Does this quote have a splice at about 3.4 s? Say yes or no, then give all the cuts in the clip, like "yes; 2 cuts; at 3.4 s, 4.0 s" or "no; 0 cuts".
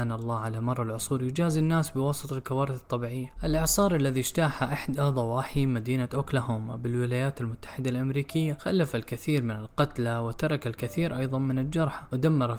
yes; 1 cut; at 3.4 s